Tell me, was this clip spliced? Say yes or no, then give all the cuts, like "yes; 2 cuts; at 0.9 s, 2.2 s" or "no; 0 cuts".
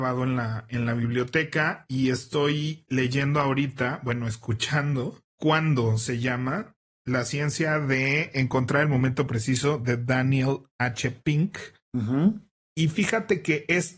no; 0 cuts